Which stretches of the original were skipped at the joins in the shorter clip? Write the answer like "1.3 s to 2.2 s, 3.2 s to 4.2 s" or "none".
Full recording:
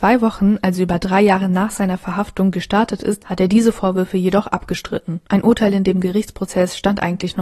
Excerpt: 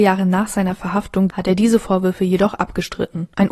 2.5 s to 3.2 s

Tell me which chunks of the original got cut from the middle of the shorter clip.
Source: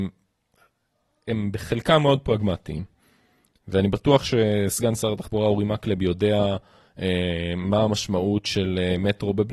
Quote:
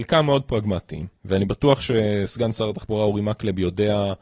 2.9 s to 3.6 s

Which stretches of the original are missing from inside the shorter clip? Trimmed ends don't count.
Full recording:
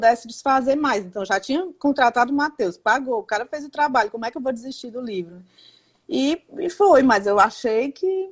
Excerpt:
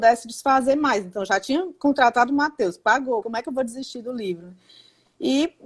3.2 s to 4.1 s

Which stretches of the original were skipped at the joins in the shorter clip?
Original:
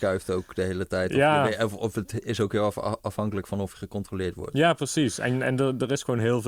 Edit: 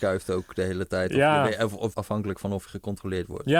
1.9 s to 3.0 s

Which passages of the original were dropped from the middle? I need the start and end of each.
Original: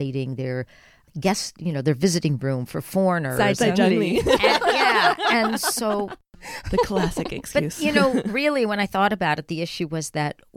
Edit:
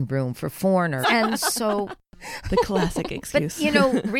3.3 s to 5.2 s

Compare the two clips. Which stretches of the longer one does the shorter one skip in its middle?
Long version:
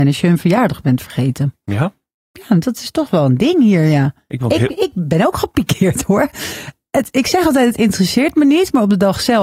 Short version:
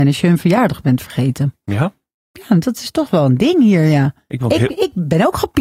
none

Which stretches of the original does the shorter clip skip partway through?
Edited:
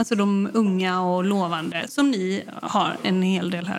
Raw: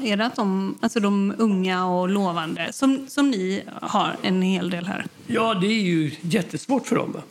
2.7 s to 3.1 s

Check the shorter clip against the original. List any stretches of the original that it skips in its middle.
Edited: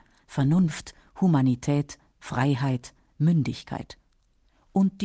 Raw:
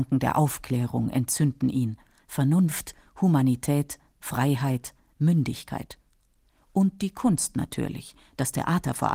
none

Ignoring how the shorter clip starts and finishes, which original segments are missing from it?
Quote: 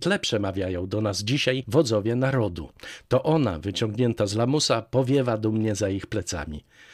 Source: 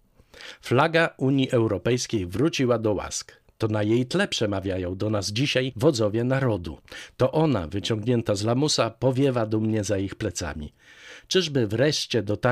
none

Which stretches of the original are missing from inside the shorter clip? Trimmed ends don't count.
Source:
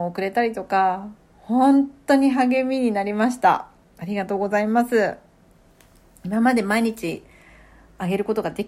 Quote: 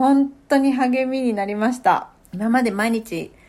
3.8 s to 6.1 s

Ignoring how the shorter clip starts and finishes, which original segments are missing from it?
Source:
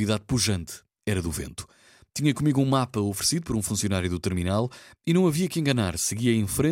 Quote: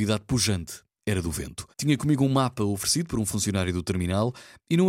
1.7 s to 2.1 s

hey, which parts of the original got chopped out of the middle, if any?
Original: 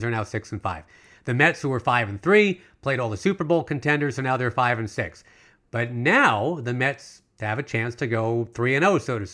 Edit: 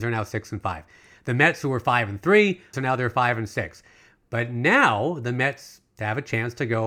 2.7 s to 4.1 s

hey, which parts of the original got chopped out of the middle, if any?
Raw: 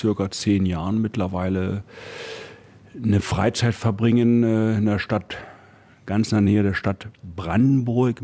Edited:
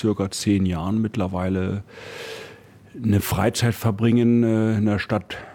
none

